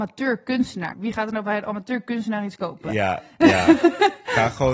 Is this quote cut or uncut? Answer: cut